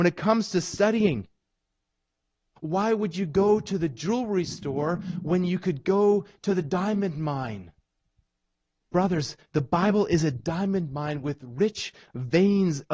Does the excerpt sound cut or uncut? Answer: cut